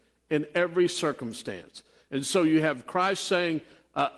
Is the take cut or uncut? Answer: uncut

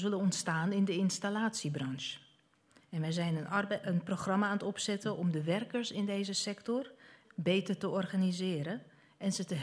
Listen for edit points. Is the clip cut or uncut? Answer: cut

